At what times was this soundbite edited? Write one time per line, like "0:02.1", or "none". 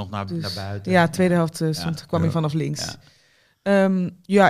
none